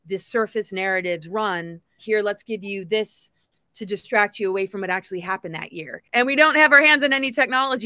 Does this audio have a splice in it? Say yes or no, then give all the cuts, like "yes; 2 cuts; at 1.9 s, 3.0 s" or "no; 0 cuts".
yes; 2 cuts; at 2.0 s, 6.1 s